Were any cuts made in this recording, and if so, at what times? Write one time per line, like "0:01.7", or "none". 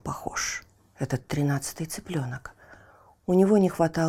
none